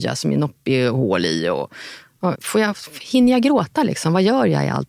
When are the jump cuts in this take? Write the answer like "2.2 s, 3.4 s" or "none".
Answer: 2.3 s